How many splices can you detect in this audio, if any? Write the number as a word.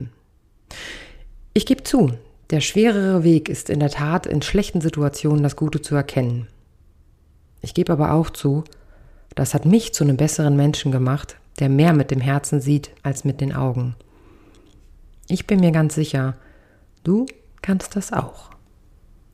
one